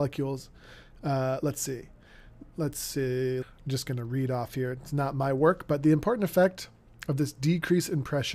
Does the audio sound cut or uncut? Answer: cut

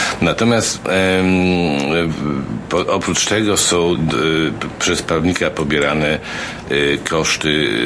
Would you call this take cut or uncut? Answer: cut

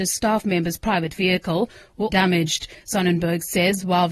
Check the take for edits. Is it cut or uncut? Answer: cut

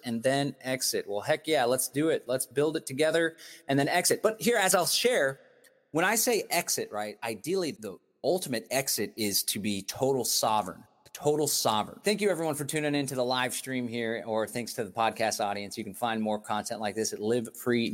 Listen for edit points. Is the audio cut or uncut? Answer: cut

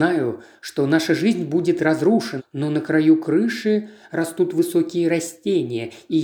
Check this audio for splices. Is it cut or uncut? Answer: cut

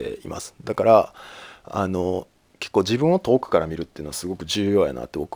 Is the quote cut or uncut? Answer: uncut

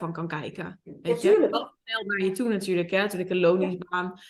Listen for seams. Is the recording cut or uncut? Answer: cut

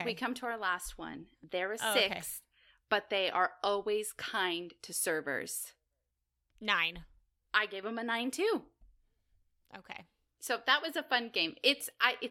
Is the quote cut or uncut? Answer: uncut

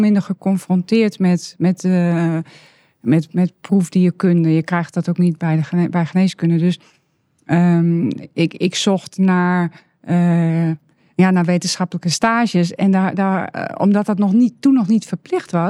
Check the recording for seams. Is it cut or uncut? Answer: uncut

